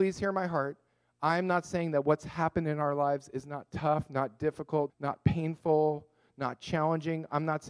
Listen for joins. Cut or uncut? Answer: cut